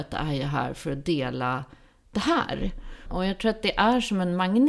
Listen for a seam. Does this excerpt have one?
yes; 1 cut; at 3.1 s

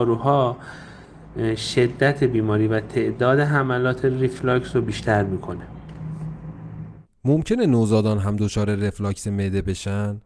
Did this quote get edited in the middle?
no; 0 cuts

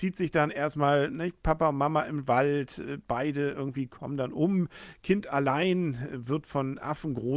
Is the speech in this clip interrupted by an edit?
no; 0 cuts

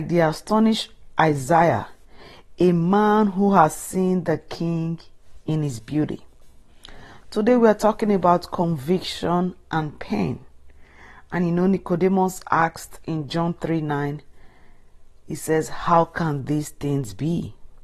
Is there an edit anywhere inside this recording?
no; 0 cuts

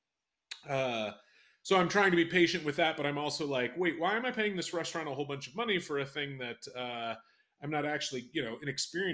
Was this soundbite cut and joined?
no; 0 cuts

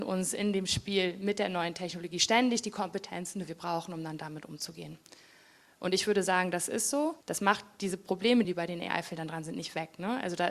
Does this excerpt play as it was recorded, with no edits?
no; 2 cuts; at 7.2 s, 8.4 s

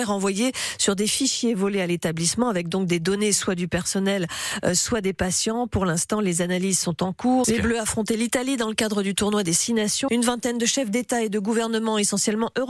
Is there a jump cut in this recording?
yes; 2 cuts; at 7.4 s, 10.1 s

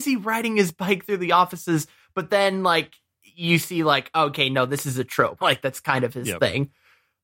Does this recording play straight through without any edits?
no; 1 cut; at 5.4 s

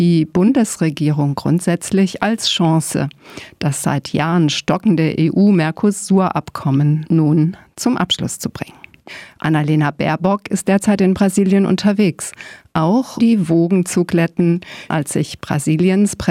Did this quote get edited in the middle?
yes; 2 cuts; at 13.2 s, 14.9 s

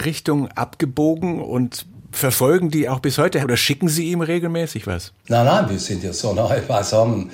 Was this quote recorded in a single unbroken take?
no; 1 cut; at 3.4 s

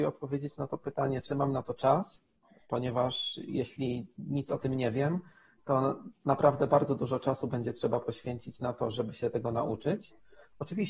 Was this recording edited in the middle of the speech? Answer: yes; 1 cut; at 8.9 s

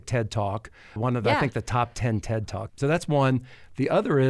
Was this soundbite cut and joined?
yes; 2 cuts; at 1.0 s, 2.7 s

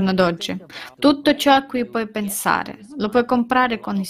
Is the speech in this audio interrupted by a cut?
yes; 1 cut; at 0.9 s

